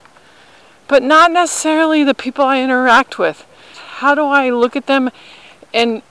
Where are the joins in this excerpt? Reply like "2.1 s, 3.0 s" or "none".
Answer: 3.7 s